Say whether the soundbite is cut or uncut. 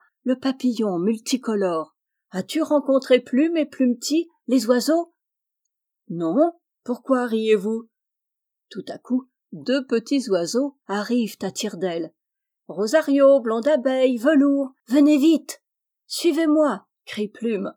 cut